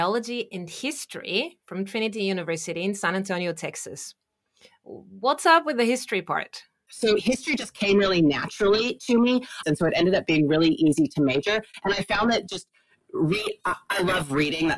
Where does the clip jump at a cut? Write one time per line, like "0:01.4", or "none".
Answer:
0:09.6